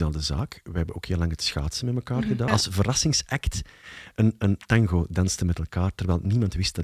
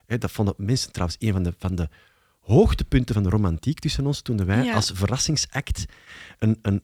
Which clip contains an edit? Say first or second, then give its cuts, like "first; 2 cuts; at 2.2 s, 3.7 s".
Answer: first; 1 cut; at 2.5 s